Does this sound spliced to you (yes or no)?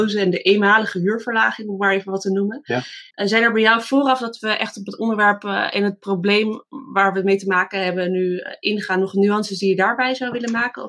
yes